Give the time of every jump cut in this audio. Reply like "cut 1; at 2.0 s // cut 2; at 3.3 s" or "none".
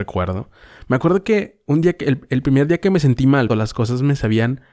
cut 1; at 3.5 s

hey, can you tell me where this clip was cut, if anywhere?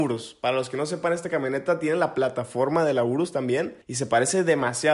cut 1; at 3.8 s

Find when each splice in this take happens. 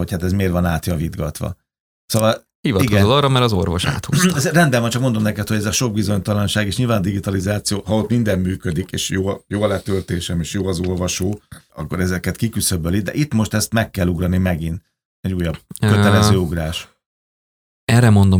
cut 1; at 11.7 s // cut 2; at 15.1 s

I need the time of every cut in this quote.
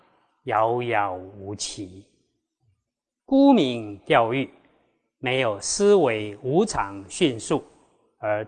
cut 1; at 3.2 s

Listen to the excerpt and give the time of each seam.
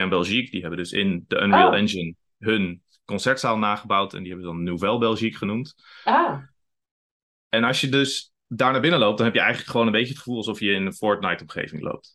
none

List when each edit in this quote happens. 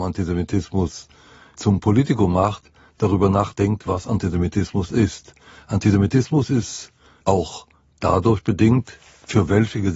none

